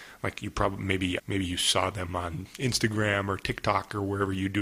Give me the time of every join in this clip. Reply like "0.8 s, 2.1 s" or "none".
1.2 s